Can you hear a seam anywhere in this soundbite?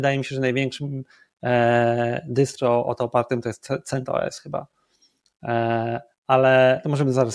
no; 0 cuts

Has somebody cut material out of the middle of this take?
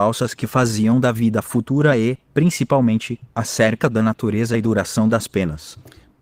no; 0 cuts

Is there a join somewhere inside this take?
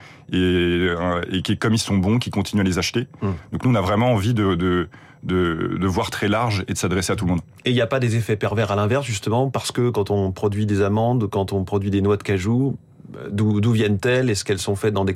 no; 0 cuts

